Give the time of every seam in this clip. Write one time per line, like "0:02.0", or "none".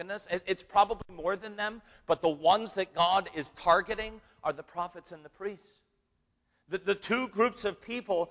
none